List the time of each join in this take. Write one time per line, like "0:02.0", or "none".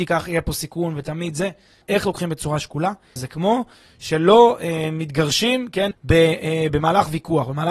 0:01.8
0:03.2
0:05.9